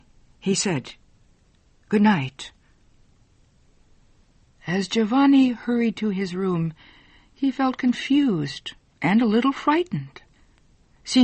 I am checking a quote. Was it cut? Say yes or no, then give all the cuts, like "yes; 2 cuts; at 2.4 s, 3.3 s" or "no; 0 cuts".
no; 0 cuts